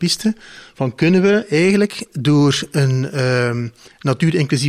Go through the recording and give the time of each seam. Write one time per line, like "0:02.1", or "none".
none